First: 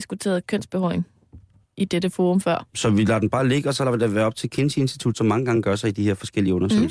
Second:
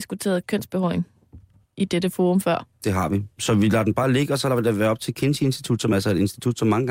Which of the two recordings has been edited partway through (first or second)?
first